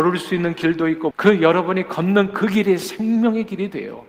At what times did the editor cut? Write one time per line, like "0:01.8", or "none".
0:01.1

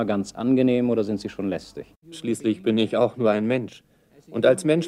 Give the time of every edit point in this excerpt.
0:02.0

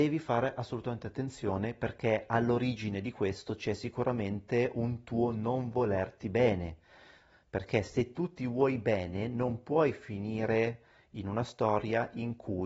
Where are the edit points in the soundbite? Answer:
none

